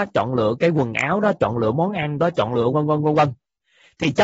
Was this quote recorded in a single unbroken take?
no; 1 cut; at 2.7 s

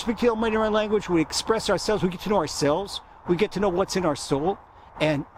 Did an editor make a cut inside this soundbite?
no; 0 cuts

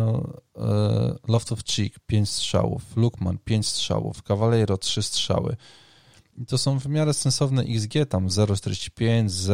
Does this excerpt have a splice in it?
no; 0 cuts

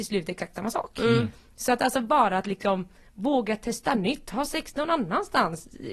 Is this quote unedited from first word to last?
yes; 0 cuts

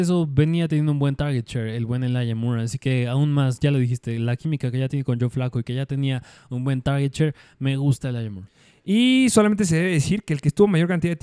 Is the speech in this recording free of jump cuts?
yes; 0 cuts

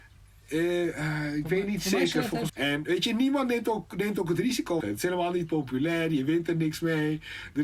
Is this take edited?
yes; 2 cuts; at 2.5 s, 4.8 s

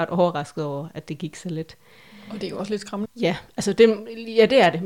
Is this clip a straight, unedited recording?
no; 1 cut; at 3.0 s

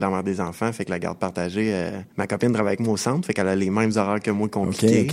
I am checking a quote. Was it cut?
yes; 1 cut; at 2.1 s

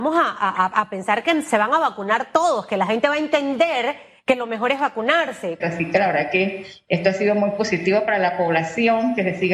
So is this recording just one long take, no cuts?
no; 1 cut; at 5.6 s

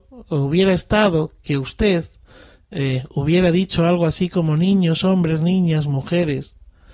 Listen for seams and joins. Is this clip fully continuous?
yes; 0 cuts

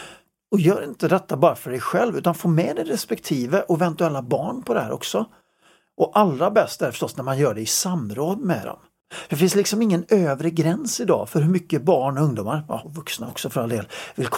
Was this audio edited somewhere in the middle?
yes; 1 cut; at 5.9 s

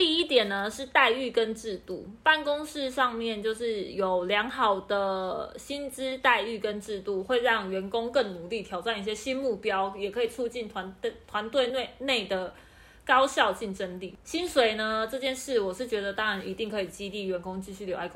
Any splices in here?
no; 0 cuts

